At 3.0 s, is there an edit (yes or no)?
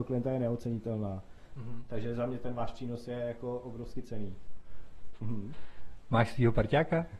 no